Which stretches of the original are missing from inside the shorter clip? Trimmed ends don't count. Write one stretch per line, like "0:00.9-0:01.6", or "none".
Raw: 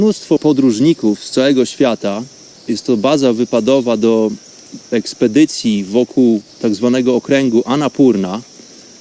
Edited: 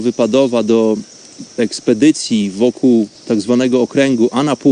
none